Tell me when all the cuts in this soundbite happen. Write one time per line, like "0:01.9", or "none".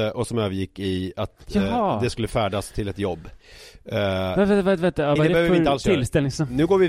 0:05.2